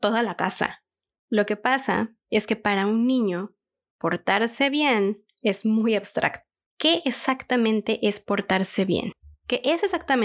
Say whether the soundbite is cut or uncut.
uncut